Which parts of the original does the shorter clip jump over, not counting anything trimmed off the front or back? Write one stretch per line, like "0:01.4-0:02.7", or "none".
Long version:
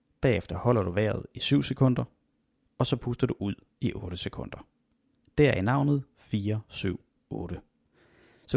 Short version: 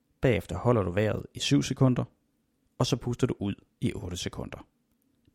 none